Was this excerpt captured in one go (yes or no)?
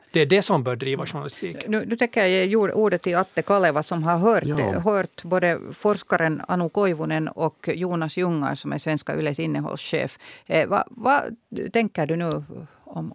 yes